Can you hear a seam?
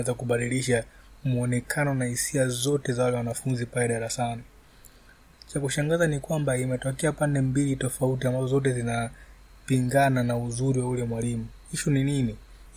yes; 1 cut; at 5.3 s

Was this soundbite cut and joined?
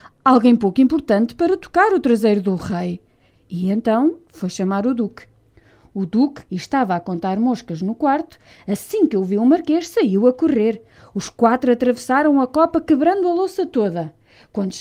yes; 1 cut; at 6.5 s

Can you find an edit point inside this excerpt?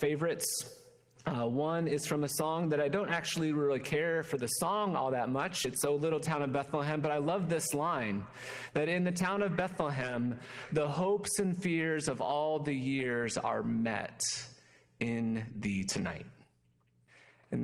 no; 0 cuts

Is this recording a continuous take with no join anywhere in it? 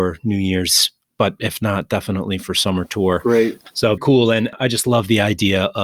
no; 1 cut; at 4.0 s

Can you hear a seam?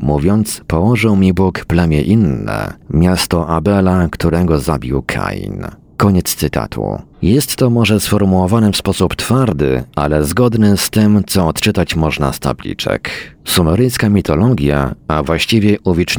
yes; 1 cut; at 7.1 s

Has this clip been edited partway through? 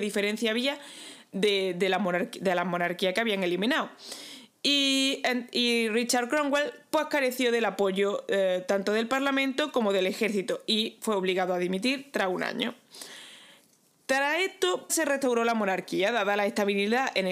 yes; 1 cut; at 14.9 s

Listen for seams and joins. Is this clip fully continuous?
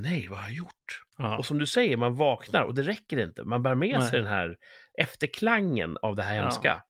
yes; 0 cuts

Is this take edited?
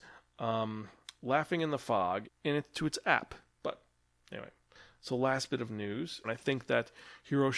yes; 3 cuts; at 2.2 s, 3.5 s, 6.2 s

